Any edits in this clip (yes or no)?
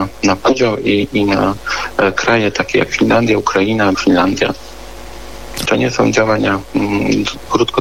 yes